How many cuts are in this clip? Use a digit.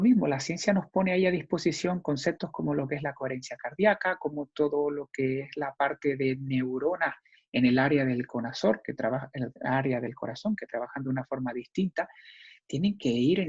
0